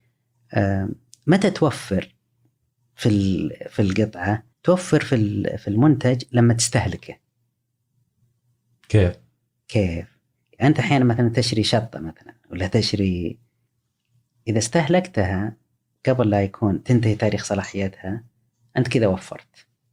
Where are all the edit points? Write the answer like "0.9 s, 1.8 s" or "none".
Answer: 4.5 s